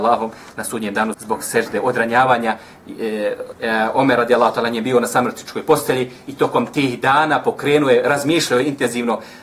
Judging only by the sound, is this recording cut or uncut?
cut